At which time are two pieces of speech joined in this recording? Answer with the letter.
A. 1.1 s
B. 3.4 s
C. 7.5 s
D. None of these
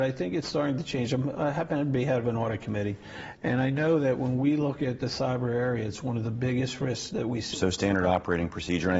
C